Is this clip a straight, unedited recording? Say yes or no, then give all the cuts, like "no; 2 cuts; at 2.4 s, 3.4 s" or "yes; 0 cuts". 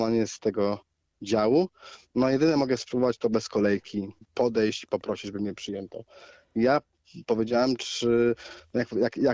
yes; 0 cuts